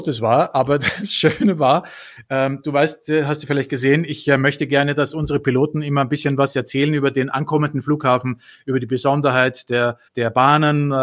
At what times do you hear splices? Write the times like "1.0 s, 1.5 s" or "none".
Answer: 10.1 s